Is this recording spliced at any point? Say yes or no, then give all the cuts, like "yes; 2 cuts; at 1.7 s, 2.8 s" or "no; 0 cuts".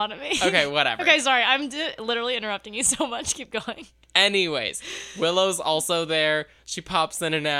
no; 0 cuts